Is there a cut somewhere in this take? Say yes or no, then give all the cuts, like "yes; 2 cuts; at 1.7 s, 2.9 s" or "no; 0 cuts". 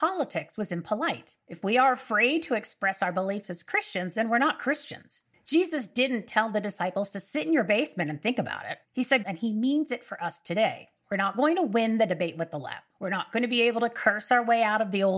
yes; 2 cuts; at 9.2 s, 11.0 s